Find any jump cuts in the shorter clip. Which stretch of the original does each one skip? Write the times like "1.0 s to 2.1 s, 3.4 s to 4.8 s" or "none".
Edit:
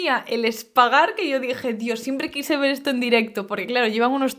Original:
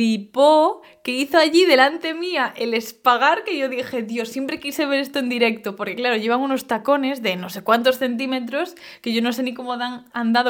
none